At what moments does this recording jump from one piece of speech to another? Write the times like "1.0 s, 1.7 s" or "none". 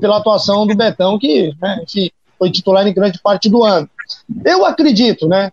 none